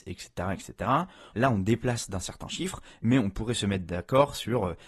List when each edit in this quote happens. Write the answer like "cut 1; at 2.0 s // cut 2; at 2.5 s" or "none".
cut 1; at 1.3 s